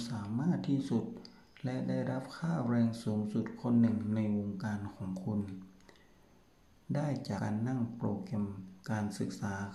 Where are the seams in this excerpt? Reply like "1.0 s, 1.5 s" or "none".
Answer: 7.4 s